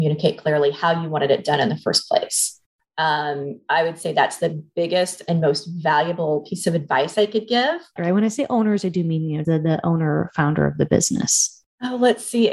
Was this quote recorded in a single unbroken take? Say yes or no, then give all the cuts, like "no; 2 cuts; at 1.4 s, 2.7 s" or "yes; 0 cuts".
no; 2 cuts; at 8.0 s, 9.4 s